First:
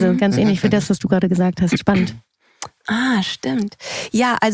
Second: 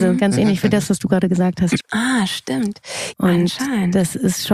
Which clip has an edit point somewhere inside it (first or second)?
second